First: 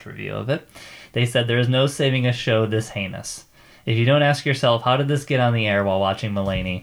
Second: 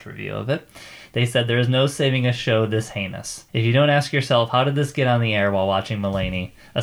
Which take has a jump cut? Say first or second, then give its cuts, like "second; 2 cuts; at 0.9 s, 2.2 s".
second; 1 cut; at 3.5 s